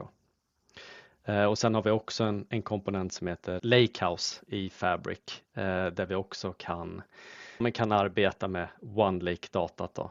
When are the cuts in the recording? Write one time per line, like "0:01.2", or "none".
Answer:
0:03.6
0:07.6